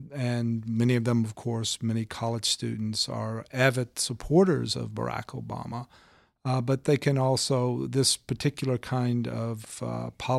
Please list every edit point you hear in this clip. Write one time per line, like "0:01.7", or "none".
none